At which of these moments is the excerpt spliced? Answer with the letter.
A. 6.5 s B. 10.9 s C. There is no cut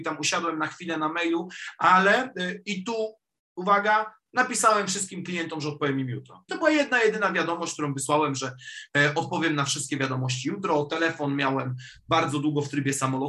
A